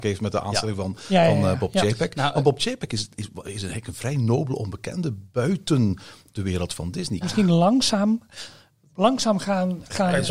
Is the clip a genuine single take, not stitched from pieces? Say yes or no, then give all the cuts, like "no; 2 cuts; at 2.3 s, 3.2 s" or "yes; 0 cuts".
no; 1 cut; at 7.2 s